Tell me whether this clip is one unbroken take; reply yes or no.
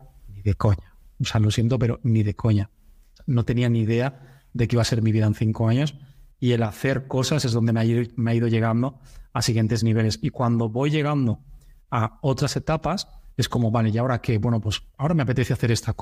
yes